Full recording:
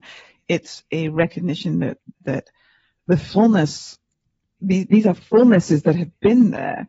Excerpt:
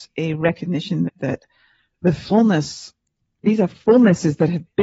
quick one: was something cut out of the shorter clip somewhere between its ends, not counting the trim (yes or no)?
yes